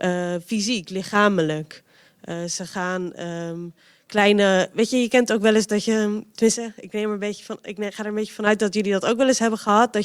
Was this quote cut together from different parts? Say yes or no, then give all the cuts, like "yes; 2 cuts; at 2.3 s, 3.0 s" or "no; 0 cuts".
no; 0 cuts